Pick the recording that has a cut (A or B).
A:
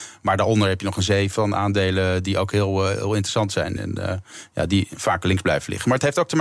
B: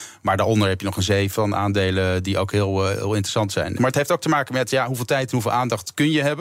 B